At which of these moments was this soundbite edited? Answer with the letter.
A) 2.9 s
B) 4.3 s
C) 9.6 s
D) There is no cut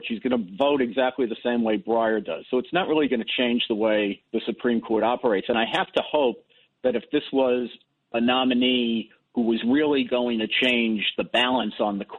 B